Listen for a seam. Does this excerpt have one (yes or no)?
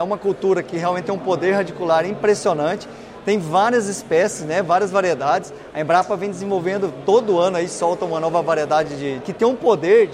yes